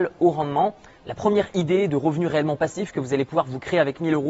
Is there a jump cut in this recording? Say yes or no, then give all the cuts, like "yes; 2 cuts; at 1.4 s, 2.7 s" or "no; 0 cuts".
yes; 1 cut; at 1.0 s